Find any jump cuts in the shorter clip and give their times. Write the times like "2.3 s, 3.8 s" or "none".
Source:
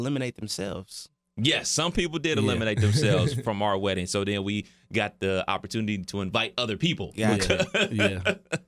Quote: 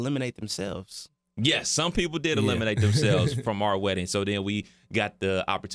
none